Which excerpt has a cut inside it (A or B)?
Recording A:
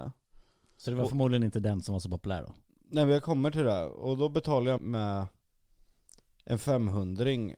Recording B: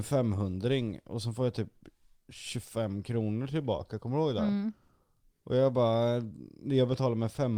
A